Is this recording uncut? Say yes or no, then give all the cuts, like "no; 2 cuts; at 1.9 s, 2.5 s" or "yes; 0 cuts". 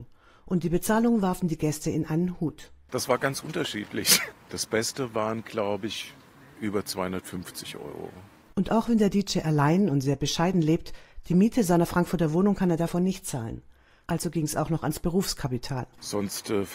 no; 1 cut; at 4.3 s